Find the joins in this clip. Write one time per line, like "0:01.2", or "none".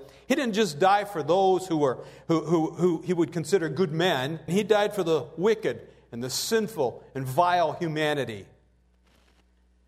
0:04.5